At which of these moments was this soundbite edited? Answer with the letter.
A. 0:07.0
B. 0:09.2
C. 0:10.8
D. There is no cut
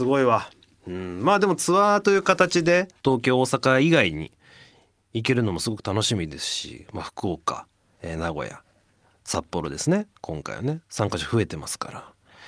C